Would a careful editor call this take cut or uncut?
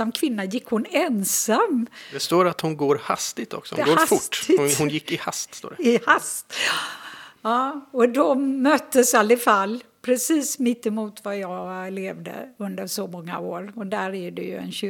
uncut